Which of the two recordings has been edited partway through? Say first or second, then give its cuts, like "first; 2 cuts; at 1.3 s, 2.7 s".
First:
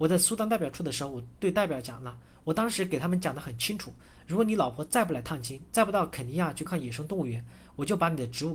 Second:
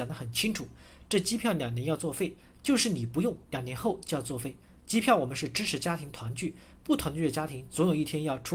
first; 1 cut; at 6.7 s